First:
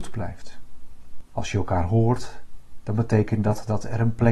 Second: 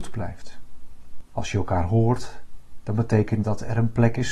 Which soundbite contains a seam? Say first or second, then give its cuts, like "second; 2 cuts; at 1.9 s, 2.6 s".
second; 1 cut; at 3.4 s